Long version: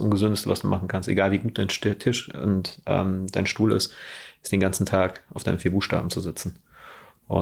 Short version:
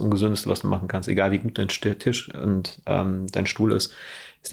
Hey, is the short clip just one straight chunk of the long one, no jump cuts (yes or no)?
yes